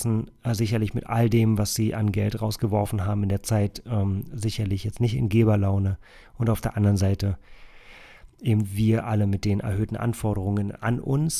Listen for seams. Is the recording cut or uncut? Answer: uncut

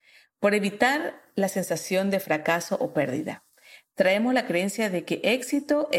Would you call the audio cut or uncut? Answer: uncut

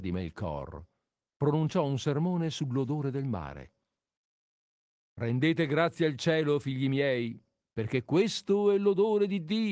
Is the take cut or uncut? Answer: cut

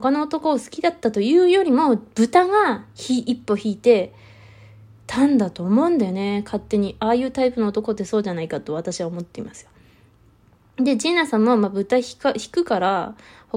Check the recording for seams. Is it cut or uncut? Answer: uncut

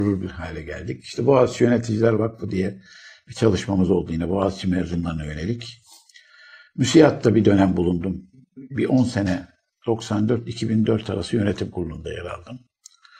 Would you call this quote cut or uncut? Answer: uncut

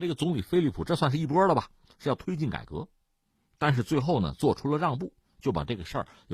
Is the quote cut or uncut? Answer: uncut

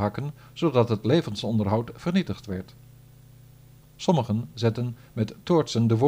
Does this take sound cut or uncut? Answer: cut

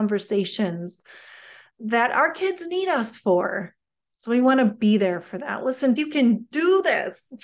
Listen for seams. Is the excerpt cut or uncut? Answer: cut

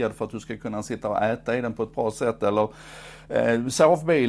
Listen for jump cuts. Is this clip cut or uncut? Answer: uncut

